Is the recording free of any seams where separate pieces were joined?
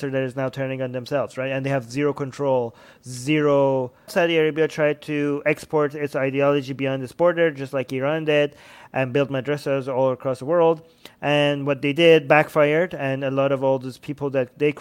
no; 1 cut; at 4.1 s

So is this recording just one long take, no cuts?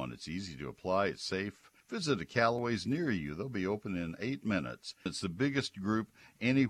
no; 2 cuts; at 1.8 s, 5.1 s

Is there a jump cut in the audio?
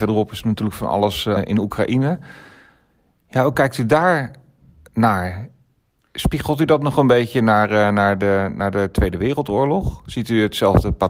yes; 1 cut; at 1.4 s

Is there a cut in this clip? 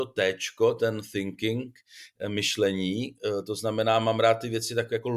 no; 0 cuts

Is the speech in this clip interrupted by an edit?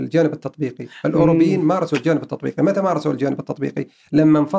no; 0 cuts

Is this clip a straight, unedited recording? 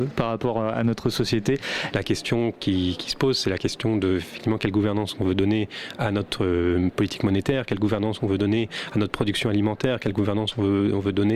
no; 1 cut; at 1.9 s

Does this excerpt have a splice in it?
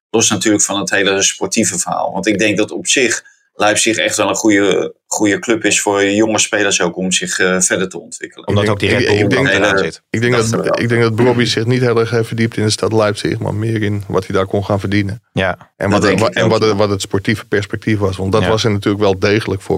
no; 0 cuts

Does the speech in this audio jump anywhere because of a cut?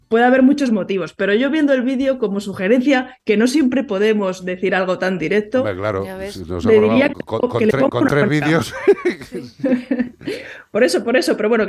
no; 0 cuts

